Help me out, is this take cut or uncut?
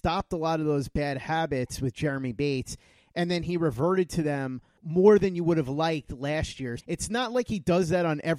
cut